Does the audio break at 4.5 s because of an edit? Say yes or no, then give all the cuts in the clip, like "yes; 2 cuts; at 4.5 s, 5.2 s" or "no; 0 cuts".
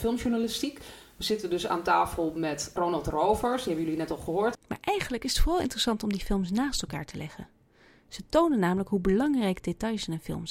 yes; 2 cuts; at 2.8 s, 4.5 s